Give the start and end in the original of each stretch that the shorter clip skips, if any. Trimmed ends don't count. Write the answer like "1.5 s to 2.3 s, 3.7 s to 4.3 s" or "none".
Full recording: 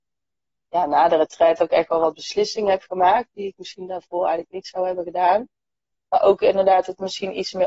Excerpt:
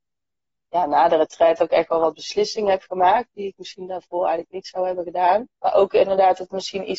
5.5 s to 6.0 s